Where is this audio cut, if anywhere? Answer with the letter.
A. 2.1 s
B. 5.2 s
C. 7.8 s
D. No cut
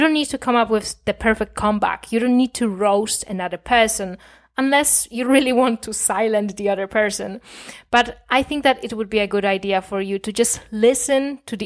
D